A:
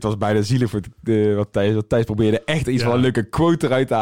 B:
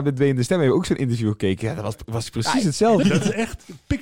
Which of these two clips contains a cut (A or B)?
B